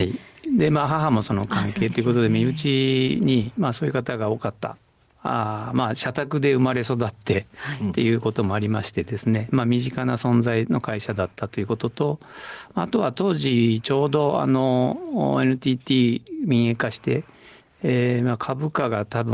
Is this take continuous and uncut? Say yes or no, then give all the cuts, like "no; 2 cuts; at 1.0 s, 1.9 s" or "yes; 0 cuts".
yes; 0 cuts